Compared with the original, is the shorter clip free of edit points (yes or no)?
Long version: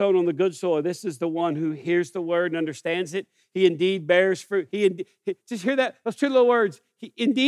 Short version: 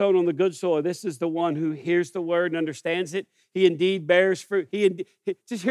yes